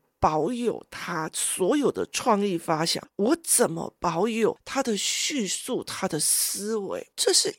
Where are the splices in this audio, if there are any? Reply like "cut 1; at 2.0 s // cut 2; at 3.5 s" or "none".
none